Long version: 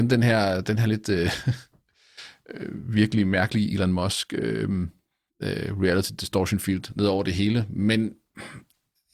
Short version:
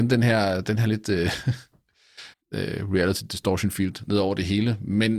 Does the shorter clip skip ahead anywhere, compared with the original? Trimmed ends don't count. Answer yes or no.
yes